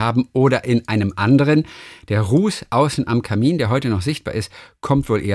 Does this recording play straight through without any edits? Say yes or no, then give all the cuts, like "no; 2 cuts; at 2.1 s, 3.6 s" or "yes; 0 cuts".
yes; 0 cuts